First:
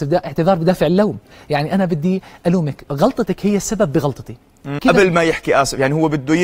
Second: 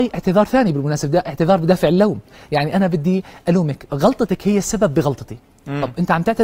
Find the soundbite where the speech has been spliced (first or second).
first